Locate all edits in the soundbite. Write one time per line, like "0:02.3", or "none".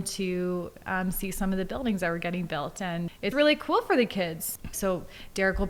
0:03.3
0:04.7